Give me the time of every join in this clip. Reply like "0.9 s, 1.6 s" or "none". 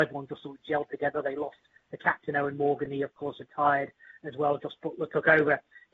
none